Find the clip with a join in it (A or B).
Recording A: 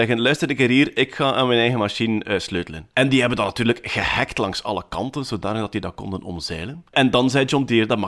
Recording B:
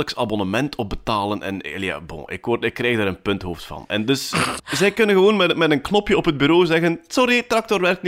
B